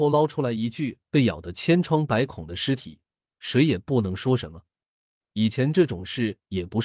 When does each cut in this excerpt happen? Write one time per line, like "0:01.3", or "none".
0:05.2